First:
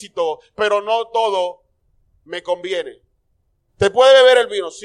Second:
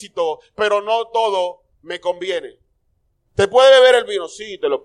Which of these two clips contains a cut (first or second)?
second